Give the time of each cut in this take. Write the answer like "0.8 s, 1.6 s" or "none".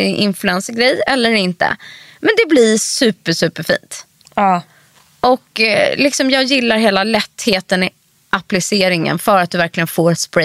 none